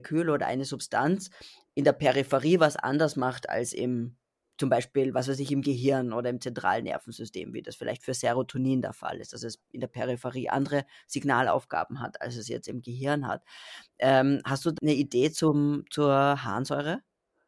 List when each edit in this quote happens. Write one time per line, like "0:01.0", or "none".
0:14.8